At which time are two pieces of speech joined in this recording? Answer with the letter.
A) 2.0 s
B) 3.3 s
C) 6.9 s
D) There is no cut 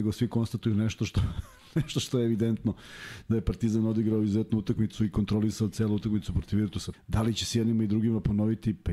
C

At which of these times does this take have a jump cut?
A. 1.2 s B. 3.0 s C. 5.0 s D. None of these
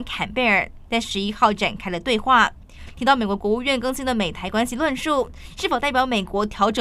D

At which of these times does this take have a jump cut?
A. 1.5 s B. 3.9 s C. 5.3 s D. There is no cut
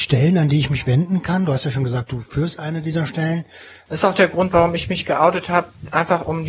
B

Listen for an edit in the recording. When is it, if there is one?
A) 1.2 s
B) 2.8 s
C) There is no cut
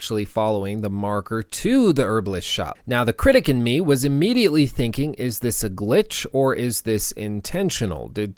B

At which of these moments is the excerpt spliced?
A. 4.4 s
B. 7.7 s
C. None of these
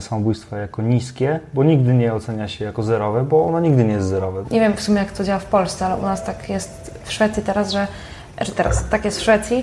A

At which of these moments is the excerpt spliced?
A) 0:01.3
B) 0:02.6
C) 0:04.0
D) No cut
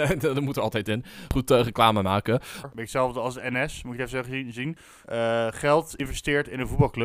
B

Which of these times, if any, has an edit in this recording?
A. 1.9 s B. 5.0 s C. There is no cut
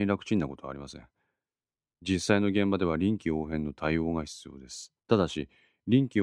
B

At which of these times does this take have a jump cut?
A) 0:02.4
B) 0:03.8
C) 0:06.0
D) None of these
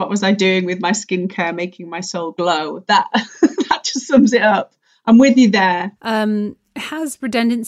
C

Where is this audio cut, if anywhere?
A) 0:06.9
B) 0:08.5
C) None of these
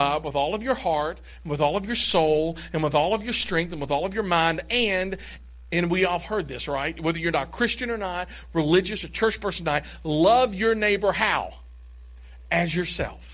C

